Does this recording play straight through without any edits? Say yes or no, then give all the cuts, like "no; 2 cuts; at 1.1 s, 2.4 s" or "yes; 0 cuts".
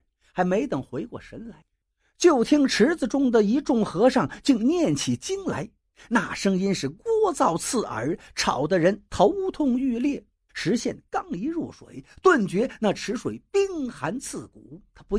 no; 1 cut; at 10.5 s